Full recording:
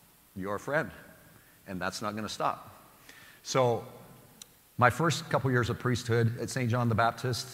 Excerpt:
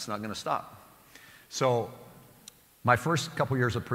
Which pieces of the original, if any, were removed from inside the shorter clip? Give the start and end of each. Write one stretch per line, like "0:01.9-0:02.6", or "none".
none